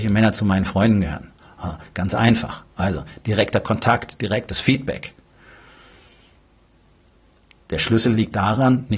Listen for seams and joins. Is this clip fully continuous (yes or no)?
yes